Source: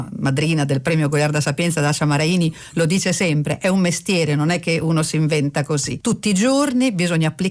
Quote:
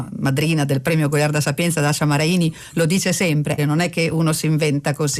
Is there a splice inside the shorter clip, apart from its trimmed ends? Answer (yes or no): yes